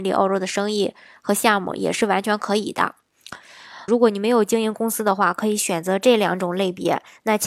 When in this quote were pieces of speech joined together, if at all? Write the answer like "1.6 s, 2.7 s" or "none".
3.9 s

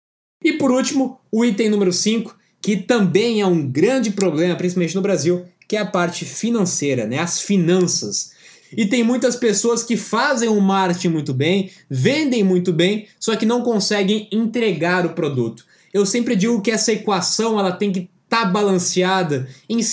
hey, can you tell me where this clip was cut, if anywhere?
8.6 s

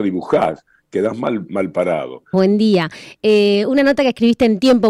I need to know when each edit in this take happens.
2.3 s

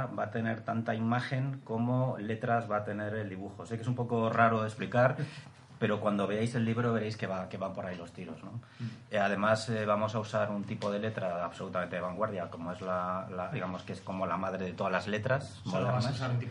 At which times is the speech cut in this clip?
13.5 s

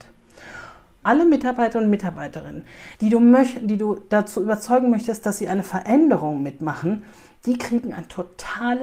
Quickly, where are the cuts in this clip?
1.0 s, 2.9 s

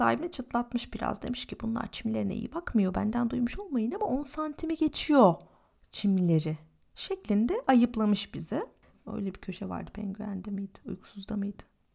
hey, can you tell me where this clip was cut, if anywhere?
8.9 s

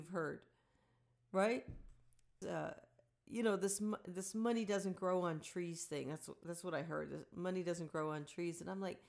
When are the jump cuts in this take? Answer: 2.4 s

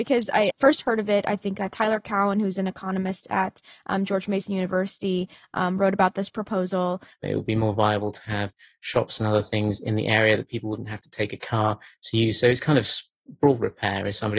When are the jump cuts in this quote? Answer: 7.1 s

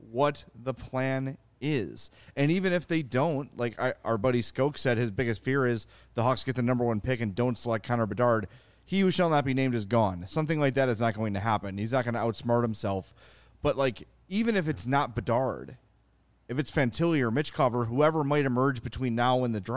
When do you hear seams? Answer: none

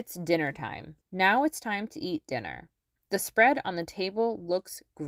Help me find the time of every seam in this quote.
1.0 s

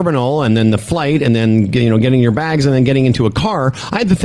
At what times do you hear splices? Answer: none

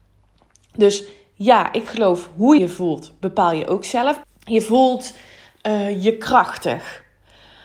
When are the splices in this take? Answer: 2.6 s, 4.2 s

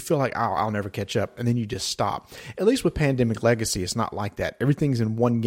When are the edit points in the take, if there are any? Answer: none

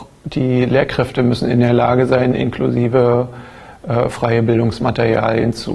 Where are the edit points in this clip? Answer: none

